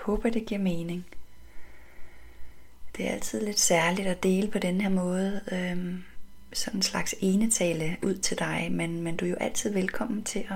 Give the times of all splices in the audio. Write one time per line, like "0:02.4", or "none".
none